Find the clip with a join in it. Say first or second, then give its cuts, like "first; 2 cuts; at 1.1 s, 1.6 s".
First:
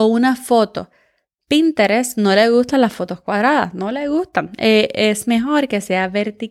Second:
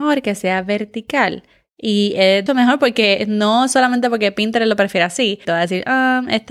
second; 2 cuts; at 2.5 s, 5.4 s